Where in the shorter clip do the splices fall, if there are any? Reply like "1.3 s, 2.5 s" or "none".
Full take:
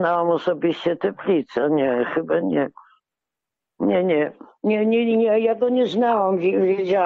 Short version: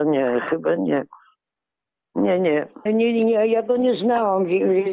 2.9 s

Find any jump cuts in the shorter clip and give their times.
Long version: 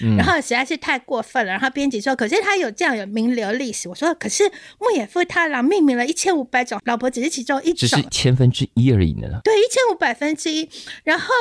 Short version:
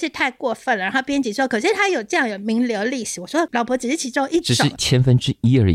3.5 s

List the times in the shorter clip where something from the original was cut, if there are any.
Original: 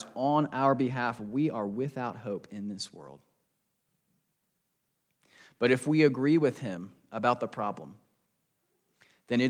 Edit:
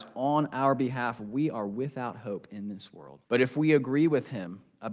3.2 s

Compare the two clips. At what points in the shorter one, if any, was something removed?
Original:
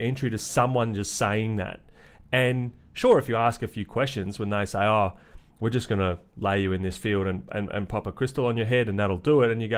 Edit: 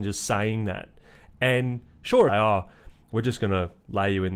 2.3 s

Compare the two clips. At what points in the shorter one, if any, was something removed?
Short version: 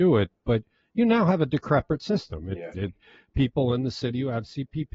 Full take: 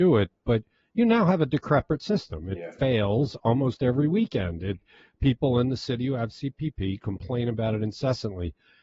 2.7 s

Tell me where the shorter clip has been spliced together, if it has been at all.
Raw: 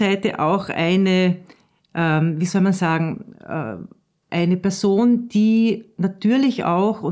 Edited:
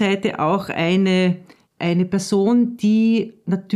1.6 s

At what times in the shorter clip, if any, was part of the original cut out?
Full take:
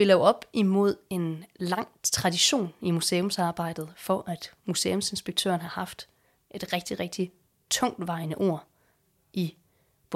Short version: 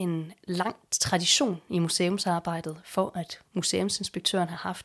none

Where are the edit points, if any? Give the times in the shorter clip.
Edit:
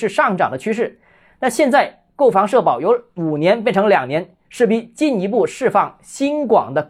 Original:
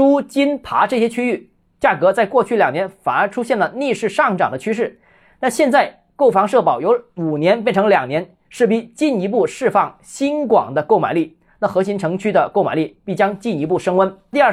none

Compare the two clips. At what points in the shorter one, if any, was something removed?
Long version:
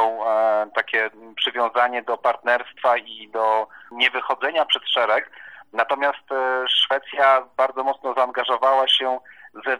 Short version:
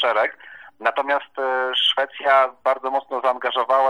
none

